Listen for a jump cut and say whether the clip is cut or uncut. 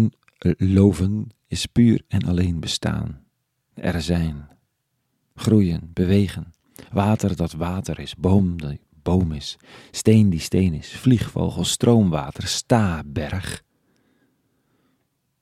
uncut